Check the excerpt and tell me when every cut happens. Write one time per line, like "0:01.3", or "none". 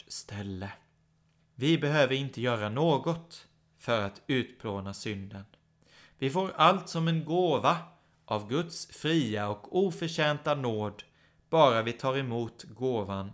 0:01.4